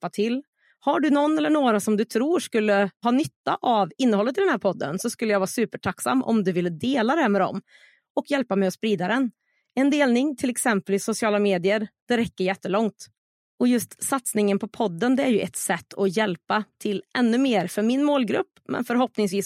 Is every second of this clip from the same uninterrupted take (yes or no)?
yes